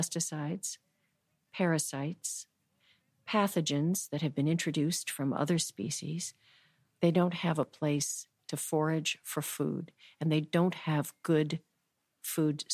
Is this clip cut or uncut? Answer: cut